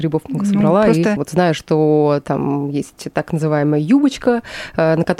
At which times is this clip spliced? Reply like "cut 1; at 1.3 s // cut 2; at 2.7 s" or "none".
cut 1; at 1.2 s